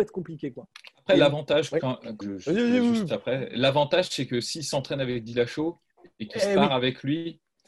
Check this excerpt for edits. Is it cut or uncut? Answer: cut